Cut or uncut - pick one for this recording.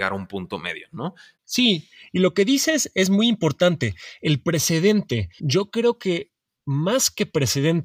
cut